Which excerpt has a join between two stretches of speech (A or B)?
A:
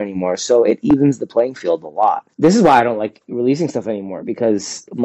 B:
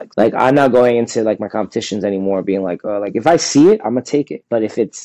A